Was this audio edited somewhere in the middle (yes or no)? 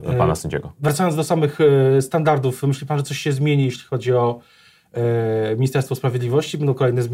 no